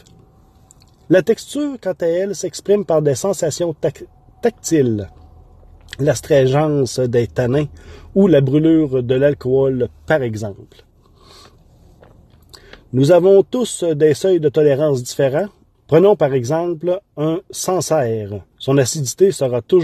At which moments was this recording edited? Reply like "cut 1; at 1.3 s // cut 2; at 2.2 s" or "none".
cut 1; at 15.7 s // cut 2; at 18.5 s